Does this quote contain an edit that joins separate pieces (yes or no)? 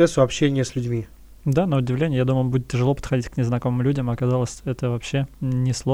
no